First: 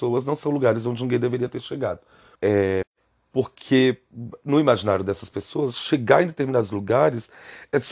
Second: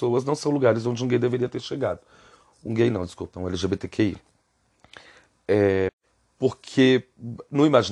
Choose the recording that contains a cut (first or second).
first